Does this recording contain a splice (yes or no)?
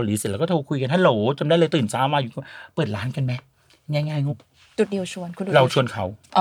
yes